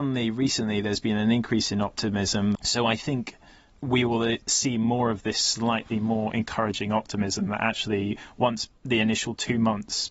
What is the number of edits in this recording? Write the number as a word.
one